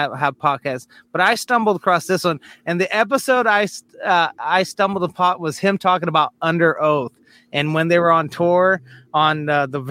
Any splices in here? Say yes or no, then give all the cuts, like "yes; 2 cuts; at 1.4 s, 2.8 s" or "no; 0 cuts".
no; 0 cuts